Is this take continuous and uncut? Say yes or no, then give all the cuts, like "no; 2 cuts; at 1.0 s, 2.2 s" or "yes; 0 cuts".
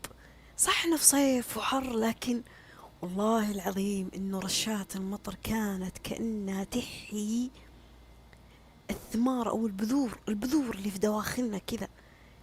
yes; 0 cuts